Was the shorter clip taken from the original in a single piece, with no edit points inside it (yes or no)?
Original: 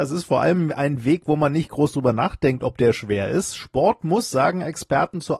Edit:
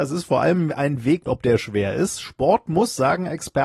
no